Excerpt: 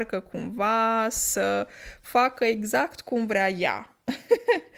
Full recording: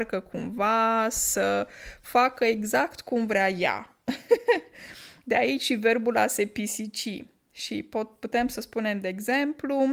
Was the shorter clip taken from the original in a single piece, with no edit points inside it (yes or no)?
yes